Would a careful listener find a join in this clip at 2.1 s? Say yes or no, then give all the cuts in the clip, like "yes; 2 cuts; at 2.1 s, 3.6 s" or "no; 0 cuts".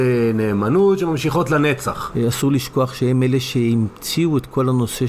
yes; 1 cut; at 2.1 s